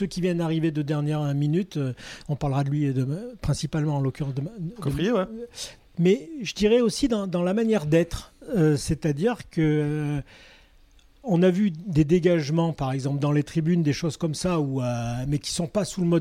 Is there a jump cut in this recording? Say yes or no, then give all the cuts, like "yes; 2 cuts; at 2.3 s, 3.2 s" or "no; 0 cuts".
yes; 1 cut; at 5.8 s